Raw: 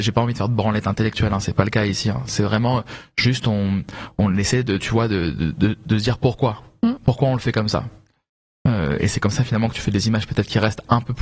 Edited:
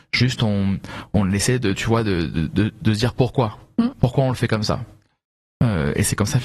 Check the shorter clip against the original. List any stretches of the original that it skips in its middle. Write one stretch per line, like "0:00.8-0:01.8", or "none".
none

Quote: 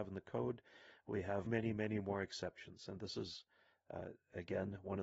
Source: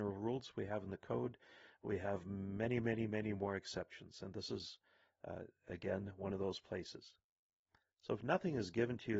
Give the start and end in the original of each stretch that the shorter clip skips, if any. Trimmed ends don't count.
0:02.2-0:02.8

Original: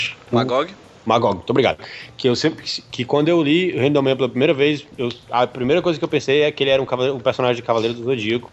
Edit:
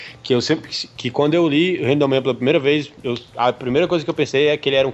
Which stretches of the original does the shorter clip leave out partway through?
none

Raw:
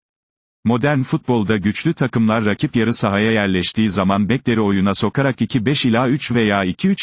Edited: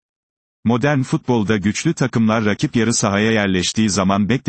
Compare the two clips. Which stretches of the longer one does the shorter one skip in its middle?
none

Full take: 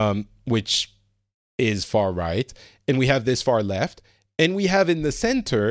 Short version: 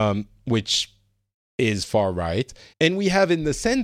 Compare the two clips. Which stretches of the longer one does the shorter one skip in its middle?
0:02.7-0:04.3

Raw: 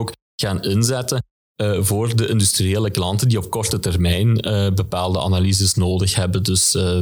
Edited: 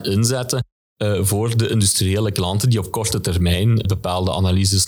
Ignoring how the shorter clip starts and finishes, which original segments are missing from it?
0:04.4-0:04.7

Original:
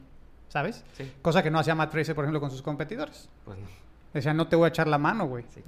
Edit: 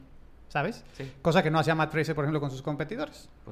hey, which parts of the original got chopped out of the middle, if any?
none

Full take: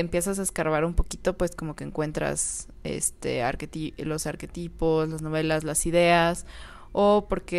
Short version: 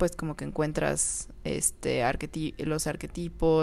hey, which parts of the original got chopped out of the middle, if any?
none

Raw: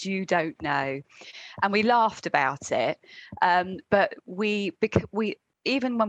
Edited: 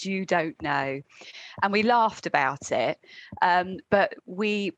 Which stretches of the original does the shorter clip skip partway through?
none

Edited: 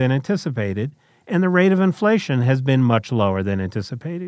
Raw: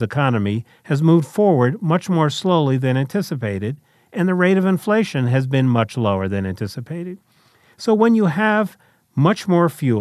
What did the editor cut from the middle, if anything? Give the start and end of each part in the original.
none

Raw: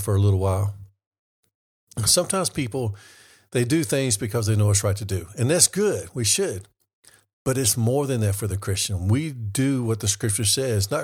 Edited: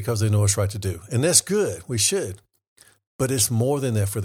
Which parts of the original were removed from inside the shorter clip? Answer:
none

